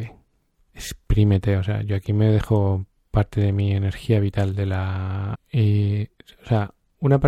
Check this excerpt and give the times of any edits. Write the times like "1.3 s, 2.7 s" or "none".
5.3 s